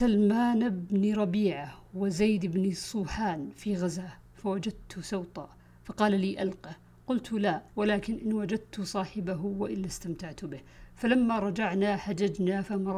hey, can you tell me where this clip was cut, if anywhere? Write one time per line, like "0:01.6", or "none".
0:07.7